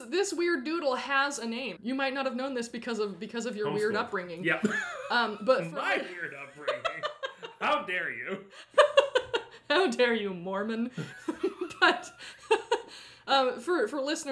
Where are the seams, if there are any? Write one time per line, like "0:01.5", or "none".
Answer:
0:01.8